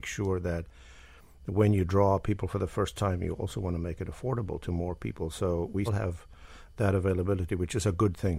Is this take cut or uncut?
cut